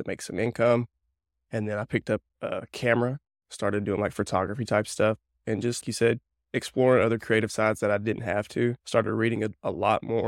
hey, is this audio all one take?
no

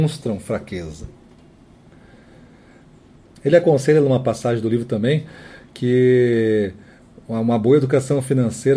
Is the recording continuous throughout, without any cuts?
no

